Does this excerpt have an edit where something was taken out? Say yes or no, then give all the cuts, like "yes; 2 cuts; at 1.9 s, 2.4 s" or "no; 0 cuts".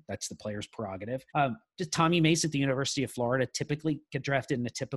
yes; 1 cut; at 1.3 s